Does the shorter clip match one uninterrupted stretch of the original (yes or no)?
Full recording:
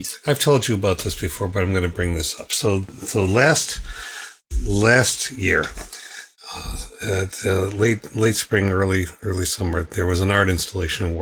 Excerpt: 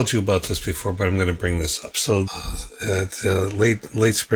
no